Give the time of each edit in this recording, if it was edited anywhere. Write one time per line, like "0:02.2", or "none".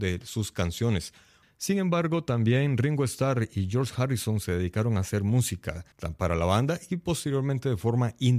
0:01.4
0:05.9